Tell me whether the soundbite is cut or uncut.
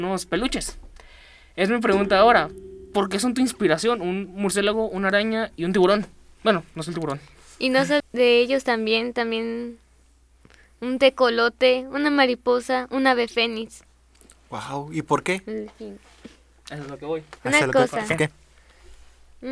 cut